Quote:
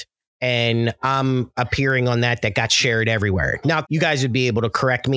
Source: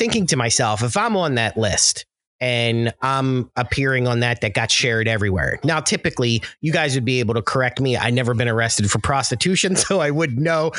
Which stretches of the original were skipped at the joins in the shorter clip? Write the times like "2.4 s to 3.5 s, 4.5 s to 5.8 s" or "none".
5.8 s to 6.6 s